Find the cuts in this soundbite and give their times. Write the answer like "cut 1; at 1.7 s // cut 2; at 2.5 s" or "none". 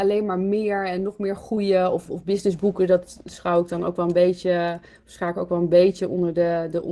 cut 1; at 2.1 s